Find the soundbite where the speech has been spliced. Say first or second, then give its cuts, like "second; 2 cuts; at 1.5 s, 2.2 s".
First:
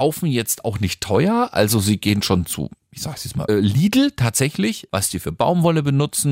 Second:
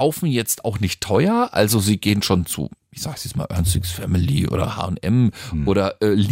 first; 2 cuts; at 3.5 s, 4.9 s